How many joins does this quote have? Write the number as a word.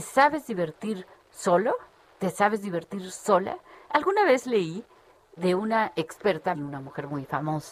two